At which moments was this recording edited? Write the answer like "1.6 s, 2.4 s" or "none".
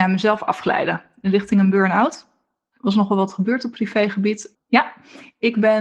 4.5 s